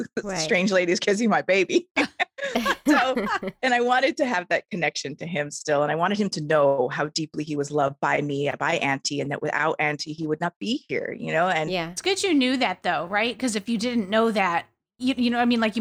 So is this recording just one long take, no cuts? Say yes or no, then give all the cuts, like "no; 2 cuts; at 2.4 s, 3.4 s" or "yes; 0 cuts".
yes; 0 cuts